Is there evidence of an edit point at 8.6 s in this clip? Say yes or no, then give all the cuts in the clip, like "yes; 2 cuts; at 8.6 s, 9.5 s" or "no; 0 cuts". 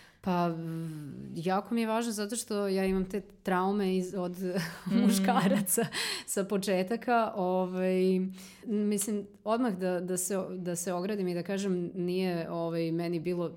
yes; 1 cut; at 8.6 s